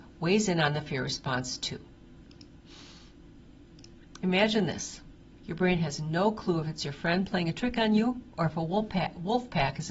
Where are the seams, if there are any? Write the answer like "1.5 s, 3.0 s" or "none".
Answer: 5.4 s